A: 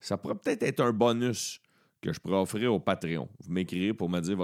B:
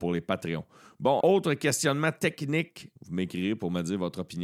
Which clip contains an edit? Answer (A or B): B